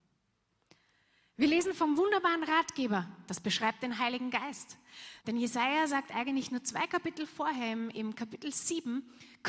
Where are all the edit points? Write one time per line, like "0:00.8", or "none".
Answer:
0:05.2